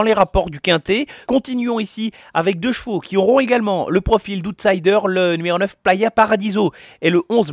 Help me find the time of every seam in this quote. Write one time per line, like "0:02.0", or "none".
none